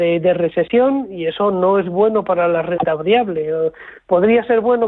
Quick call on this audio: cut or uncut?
uncut